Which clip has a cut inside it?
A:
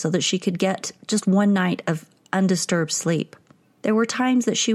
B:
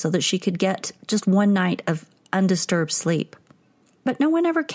A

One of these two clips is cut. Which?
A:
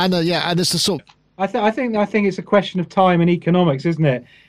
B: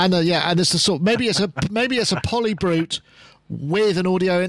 A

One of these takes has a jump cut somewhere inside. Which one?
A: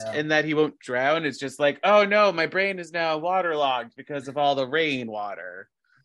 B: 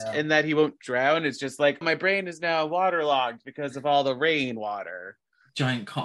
B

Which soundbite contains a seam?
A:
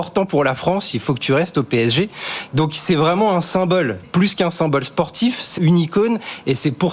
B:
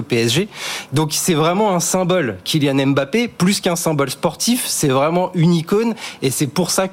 A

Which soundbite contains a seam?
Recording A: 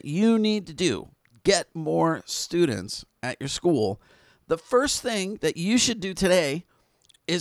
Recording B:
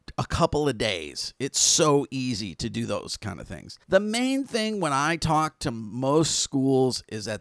B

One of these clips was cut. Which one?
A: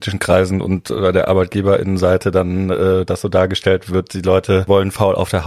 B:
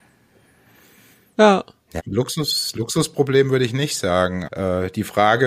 B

